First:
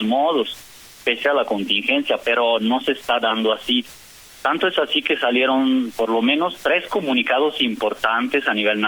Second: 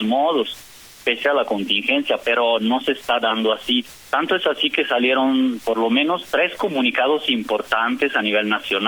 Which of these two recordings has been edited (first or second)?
second